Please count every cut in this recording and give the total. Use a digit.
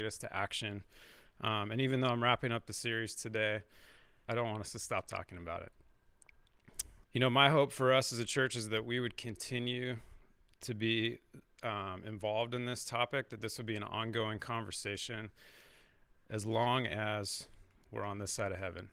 2